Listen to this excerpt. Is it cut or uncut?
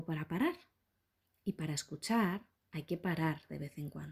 cut